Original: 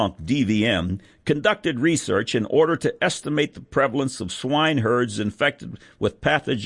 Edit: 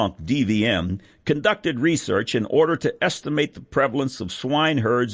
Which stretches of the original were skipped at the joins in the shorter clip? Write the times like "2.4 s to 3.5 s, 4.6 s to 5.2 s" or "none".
none